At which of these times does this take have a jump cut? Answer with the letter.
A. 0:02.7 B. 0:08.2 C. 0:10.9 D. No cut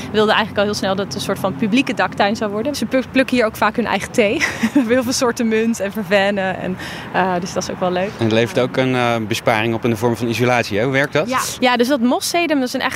A